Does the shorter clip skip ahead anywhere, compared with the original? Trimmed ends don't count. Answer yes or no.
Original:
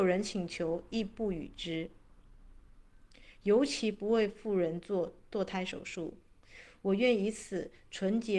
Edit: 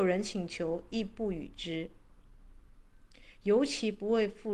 no